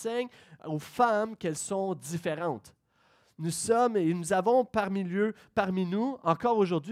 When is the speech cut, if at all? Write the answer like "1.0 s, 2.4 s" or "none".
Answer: none

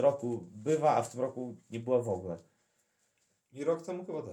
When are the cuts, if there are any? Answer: none

